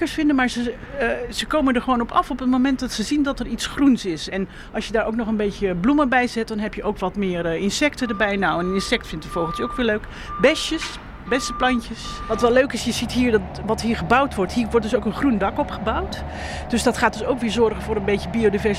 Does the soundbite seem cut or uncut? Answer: uncut